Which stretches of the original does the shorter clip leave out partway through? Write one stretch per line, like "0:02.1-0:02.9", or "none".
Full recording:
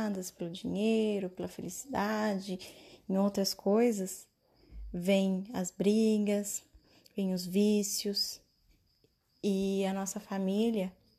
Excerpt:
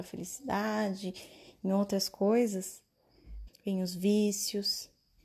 0:04.9-0:07.0